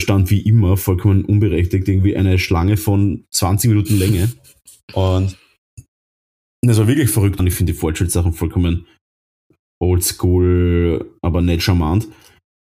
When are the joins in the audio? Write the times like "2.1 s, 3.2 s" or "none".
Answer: 7.4 s

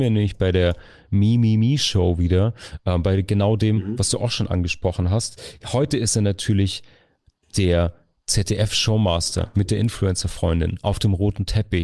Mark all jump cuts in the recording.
none

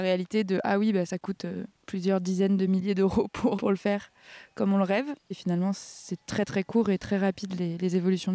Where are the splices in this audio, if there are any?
3.5 s, 5.3 s

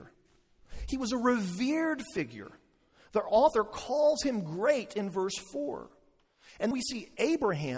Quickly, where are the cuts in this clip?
6.7 s

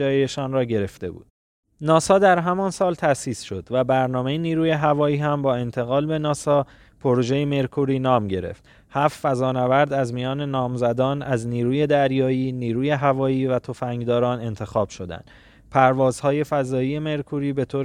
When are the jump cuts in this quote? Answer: none

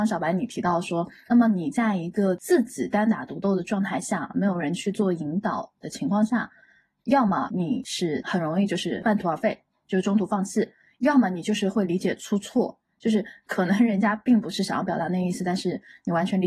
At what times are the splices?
1.3 s

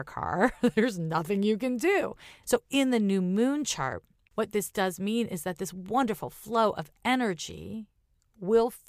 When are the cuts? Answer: 2.4 s

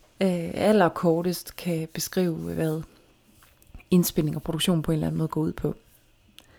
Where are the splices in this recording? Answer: none

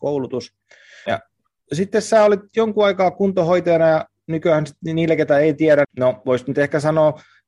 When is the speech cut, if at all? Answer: 1.1 s, 5.8 s

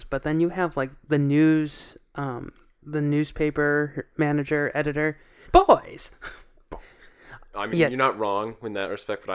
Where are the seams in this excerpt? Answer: 5.4 s, 7.5 s

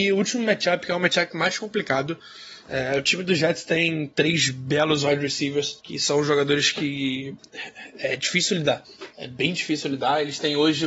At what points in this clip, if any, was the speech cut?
none

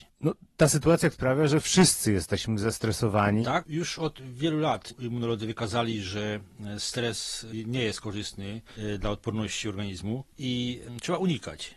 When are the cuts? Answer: 1.1 s, 3.4 s

